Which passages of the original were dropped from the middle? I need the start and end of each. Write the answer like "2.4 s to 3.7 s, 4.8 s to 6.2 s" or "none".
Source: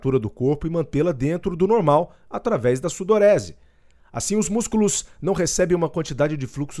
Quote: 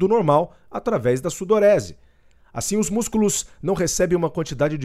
none